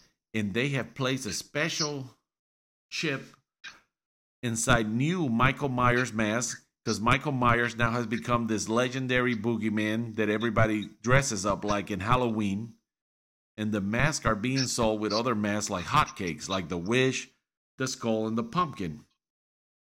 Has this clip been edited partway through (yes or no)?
no